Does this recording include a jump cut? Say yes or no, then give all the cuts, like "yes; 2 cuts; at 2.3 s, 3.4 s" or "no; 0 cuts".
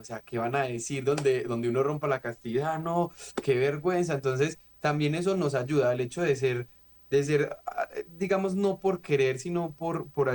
no; 0 cuts